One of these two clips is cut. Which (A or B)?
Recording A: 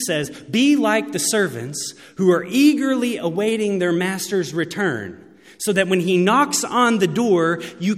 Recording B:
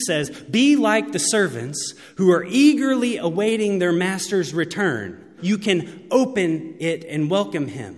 B